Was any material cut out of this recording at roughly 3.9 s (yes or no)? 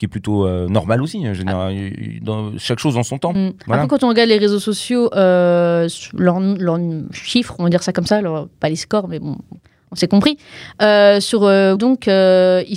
no